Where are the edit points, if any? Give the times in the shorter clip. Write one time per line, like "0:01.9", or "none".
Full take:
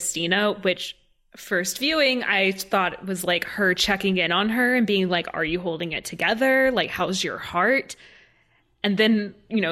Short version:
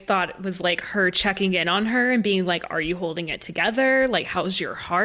none